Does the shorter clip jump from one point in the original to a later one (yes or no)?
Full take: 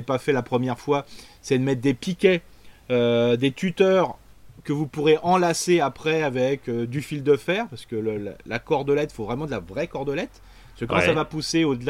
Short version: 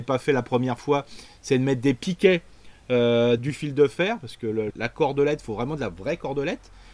yes